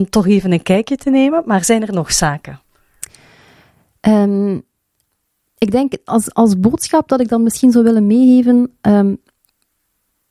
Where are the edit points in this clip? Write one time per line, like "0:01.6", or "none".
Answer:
none